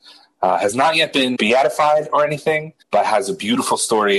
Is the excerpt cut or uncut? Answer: cut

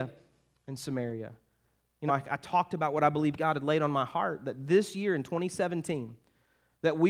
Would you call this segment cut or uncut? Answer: cut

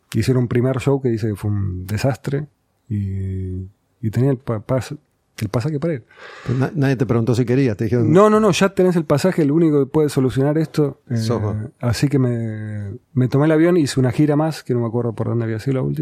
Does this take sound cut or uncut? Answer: uncut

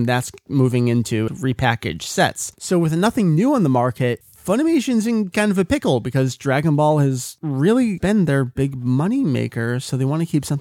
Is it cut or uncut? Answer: cut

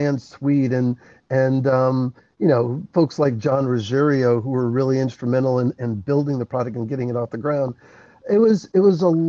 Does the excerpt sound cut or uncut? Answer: uncut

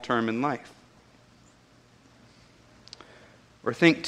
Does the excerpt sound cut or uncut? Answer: uncut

